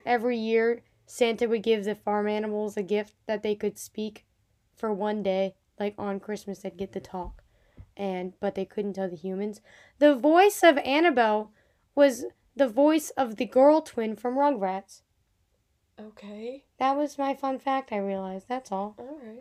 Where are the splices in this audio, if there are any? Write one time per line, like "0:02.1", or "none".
none